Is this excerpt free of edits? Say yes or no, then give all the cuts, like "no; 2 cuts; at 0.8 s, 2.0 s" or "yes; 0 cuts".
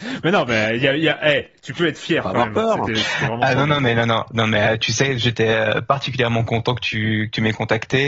yes; 0 cuts